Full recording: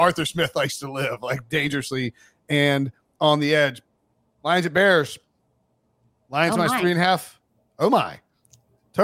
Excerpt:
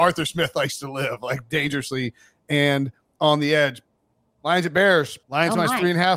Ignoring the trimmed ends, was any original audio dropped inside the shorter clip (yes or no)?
yes